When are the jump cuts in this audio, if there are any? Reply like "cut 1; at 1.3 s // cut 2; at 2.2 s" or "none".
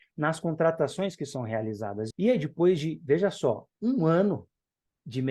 cut 1; at 2.1 s